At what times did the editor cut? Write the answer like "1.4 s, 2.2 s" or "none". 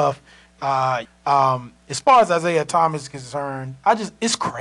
1.1 s

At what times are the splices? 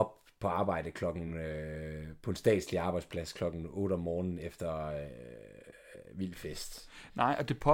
none

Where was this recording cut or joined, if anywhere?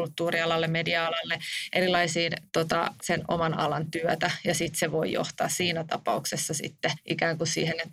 3.0 s

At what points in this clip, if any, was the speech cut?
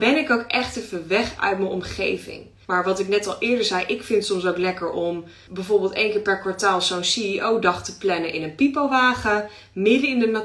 2.6 s, 5.5 s

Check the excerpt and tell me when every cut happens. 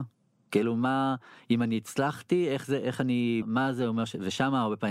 3.4 s

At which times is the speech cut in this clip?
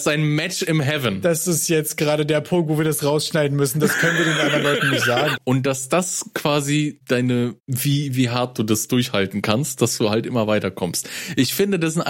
5.4 s

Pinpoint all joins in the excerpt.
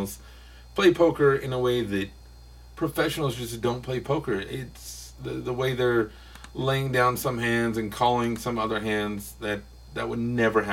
none

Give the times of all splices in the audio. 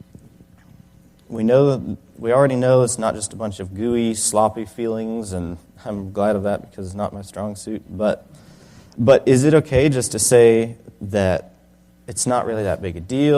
8.9 s

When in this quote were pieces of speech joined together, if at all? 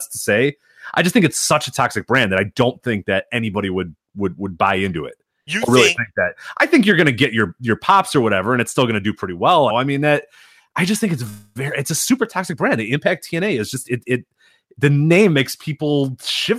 9.7 s

